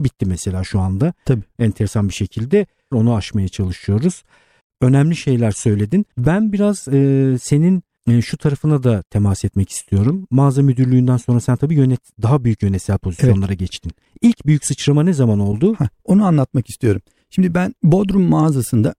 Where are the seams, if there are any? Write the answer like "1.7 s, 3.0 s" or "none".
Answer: 2.9 s, 6.1 s